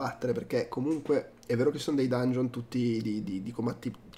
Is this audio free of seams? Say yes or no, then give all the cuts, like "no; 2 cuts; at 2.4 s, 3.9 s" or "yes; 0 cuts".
yes; 0 cuts